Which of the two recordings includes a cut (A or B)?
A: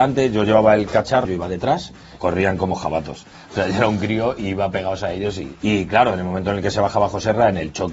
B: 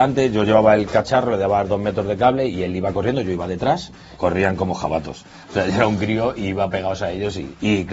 A